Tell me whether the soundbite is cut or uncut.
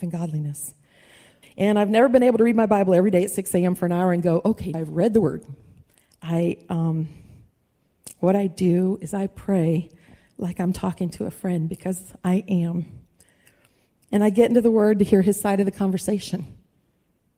cut